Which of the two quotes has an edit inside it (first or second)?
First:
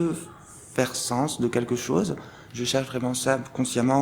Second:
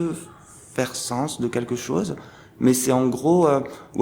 first